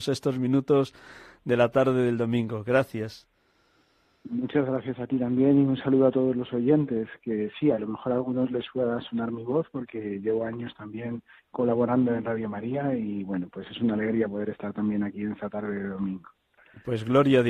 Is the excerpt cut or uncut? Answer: uncut